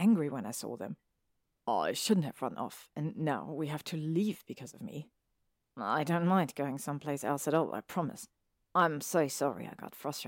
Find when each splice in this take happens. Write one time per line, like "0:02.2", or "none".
none